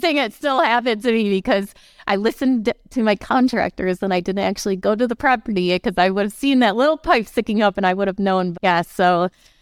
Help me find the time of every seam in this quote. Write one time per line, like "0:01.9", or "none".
0:08.5